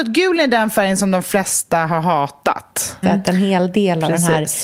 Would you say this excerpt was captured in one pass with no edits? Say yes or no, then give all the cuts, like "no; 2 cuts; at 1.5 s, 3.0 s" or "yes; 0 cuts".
no; 1 cut; at 3.0 s